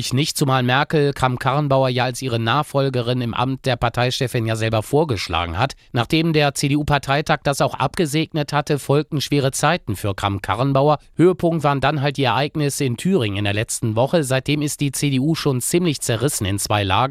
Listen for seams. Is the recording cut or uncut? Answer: uncut